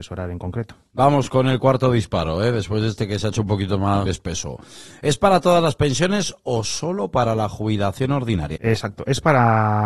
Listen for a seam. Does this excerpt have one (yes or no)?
yes